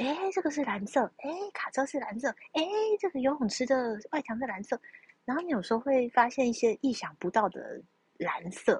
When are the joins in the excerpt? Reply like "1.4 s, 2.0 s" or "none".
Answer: none